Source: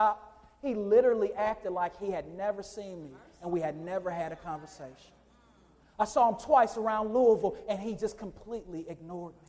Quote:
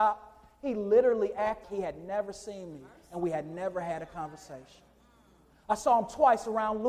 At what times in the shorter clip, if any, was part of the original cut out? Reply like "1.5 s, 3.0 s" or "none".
1.6 s